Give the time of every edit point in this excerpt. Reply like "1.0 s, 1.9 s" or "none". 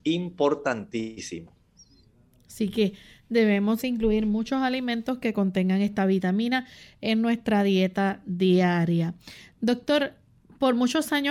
3.8 s